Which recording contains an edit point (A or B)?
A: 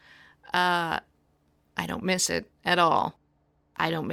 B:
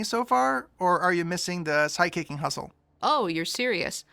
B